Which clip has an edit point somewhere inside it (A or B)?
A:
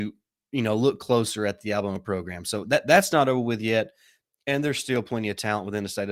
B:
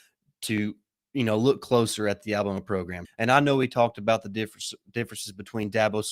B